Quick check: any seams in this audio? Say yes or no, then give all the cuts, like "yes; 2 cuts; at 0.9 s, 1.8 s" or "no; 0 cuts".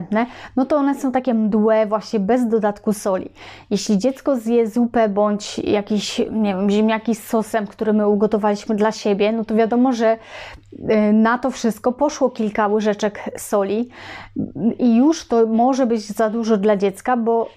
no; 0 cuts